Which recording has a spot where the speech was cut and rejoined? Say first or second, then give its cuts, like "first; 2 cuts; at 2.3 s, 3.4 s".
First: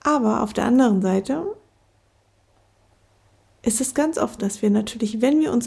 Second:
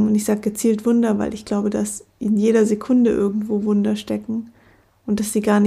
first; 1 cut; at 4.4 s